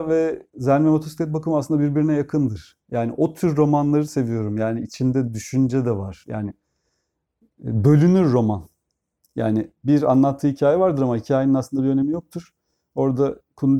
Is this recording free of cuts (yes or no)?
yes